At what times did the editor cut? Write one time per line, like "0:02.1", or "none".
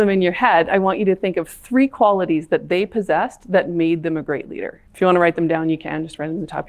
0:04.9